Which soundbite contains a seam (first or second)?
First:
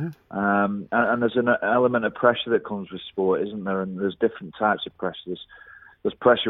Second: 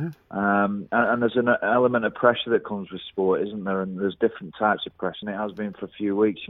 second